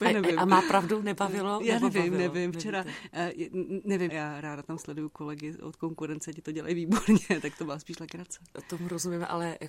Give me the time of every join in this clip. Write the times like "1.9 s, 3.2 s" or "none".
4.1 s